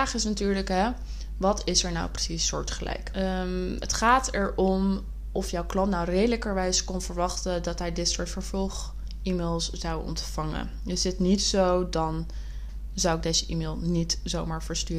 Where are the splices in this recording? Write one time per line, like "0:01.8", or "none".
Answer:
0:03.1